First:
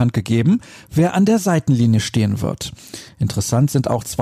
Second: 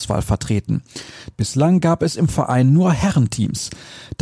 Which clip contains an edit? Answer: second; 1 cut; at 1.3 s

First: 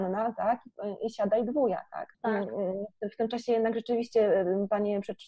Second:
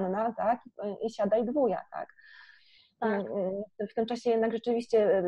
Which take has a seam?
first; 1 cut; at 2.1 s

